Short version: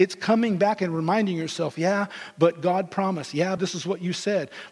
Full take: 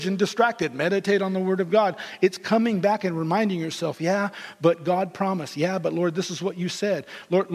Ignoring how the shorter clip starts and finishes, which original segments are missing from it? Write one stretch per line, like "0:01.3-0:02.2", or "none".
0:05.8-0:06.1